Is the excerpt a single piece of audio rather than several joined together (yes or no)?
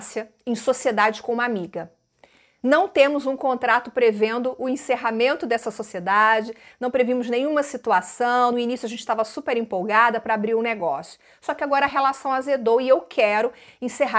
yes